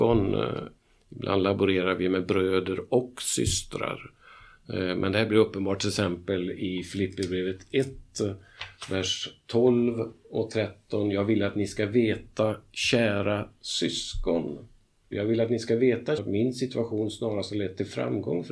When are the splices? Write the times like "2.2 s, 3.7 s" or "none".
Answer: 15.1 s, 16.2 s